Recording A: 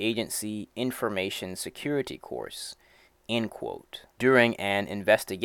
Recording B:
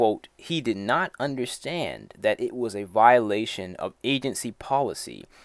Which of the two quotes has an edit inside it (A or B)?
A